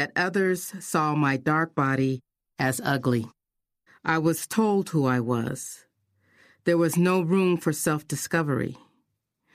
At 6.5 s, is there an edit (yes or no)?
no